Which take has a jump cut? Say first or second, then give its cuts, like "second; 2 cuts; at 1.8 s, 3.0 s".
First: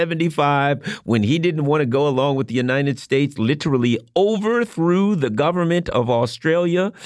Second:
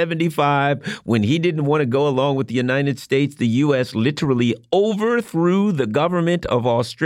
first; 1 cut; at 3.4 s